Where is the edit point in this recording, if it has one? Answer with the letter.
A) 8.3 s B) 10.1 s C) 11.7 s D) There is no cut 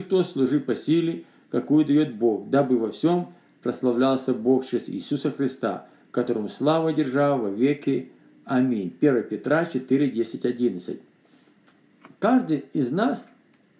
D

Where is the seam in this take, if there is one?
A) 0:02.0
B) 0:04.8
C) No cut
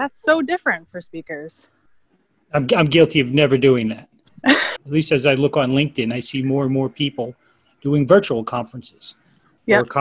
B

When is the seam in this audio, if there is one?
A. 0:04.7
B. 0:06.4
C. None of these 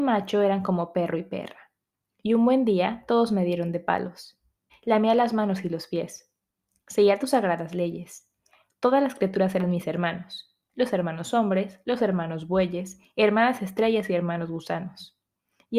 A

